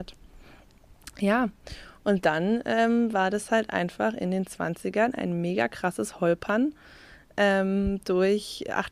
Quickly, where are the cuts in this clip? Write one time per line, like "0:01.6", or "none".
none

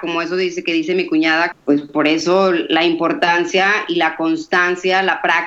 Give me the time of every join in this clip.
0:01.5

